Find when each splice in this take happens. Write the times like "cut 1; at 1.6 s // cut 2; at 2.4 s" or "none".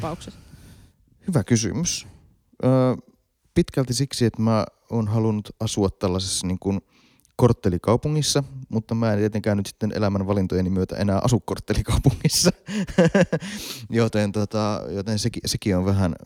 none